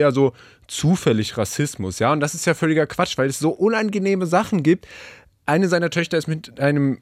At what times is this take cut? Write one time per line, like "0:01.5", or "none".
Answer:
none